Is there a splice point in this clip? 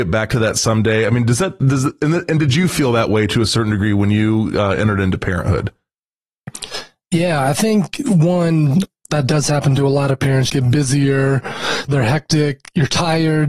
yes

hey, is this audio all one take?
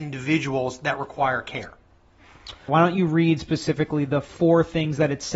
no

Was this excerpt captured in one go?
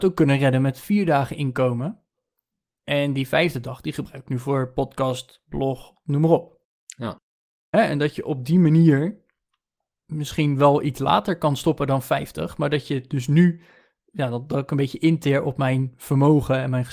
no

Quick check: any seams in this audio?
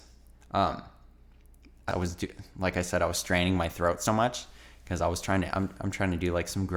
yes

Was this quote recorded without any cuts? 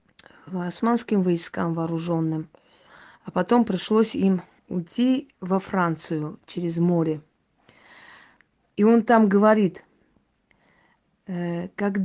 no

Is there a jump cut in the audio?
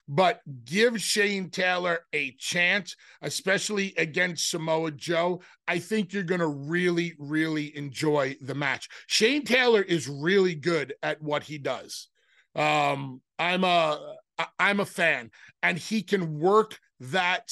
no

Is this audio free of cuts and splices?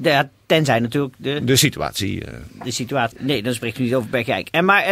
no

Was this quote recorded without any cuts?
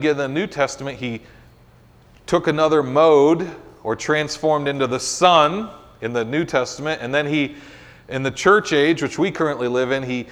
yes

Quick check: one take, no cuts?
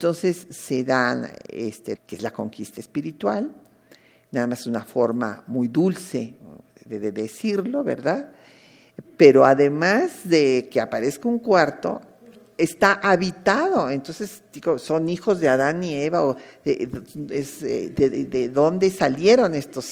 no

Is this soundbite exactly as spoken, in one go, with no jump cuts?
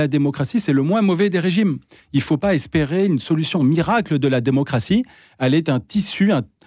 yes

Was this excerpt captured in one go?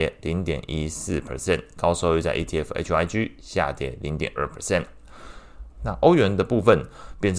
no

